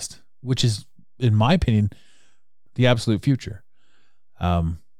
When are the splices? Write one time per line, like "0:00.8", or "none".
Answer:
0:02.7